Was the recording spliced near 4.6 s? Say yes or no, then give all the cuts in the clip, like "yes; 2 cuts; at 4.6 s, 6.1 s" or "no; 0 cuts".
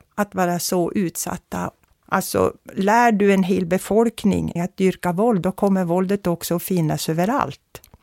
yes; 2 cuts; at 1.9 s, 4.6 s